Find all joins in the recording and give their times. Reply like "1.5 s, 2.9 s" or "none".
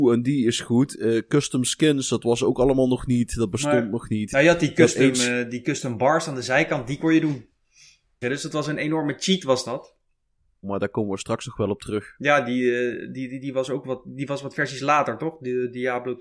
8.2 s, 10.6 s